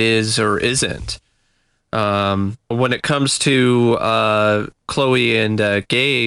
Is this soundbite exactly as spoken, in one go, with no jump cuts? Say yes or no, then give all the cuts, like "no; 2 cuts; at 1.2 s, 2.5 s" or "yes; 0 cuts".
no; 2 cuts; at 2.7 s, 4.8 s